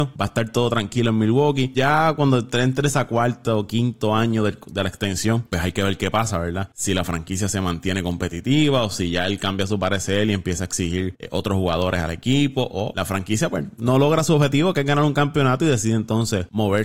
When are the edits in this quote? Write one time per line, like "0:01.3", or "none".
none